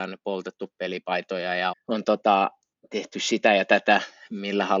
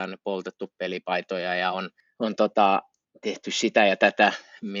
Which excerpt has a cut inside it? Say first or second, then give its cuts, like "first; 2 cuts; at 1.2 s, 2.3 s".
first; 1 cut; at 1.7 s